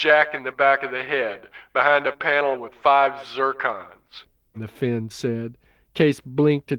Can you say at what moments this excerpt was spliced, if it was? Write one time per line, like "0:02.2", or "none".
0:04.5